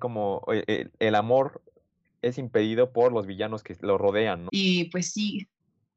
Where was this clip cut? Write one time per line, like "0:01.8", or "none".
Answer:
0:04.5